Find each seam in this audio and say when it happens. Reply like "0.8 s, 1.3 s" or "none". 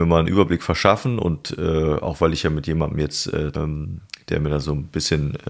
3.5 s